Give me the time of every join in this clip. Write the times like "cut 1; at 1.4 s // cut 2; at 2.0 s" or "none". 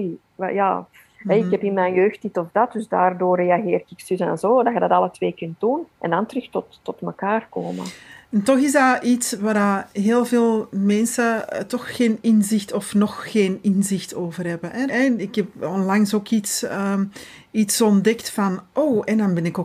cut 1; at 5.9 s // cut 2; at 14.9 s